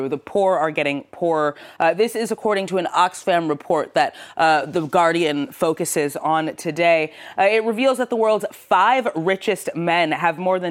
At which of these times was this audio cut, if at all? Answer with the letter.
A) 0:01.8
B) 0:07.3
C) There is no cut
C